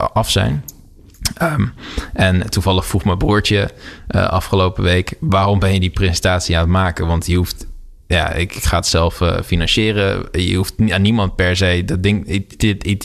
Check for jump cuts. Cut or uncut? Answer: uncut